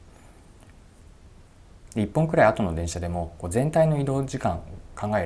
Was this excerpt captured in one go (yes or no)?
no